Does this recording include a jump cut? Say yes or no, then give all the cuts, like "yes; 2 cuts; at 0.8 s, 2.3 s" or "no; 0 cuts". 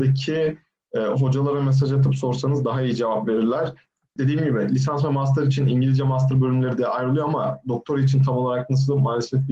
yes; 1 cut; at 4.2 s